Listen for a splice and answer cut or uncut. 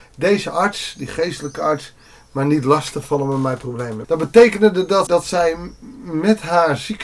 cut